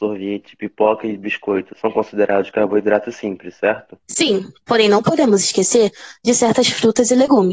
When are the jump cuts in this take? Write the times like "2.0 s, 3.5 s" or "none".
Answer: 4.0 s